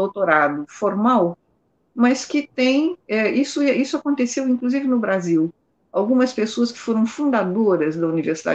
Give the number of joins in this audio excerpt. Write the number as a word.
zero